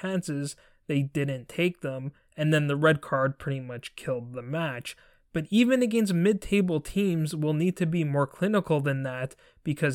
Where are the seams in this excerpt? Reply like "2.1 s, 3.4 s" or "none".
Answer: none